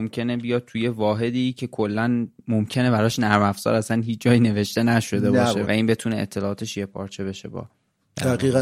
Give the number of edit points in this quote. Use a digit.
1